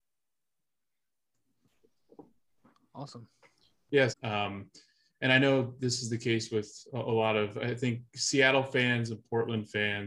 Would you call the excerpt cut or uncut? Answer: cut